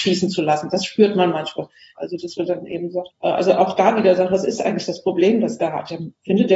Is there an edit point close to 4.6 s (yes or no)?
no